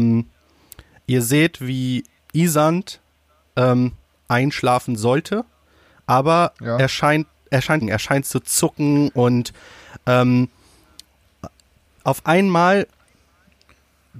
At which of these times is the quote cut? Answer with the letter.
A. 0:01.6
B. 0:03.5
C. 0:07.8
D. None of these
C